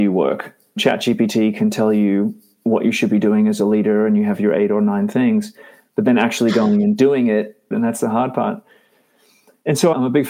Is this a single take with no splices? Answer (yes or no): no